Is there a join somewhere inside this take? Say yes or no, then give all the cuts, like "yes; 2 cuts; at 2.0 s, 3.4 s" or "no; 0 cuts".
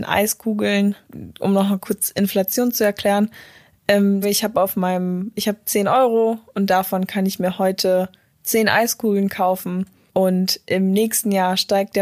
yes; 1 cut; at 4.2 s